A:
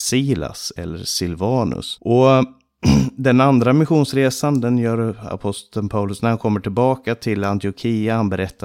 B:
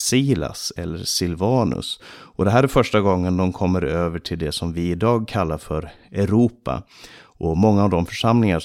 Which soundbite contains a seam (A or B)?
A